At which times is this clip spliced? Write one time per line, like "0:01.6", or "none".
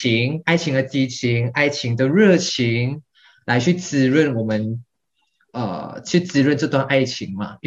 none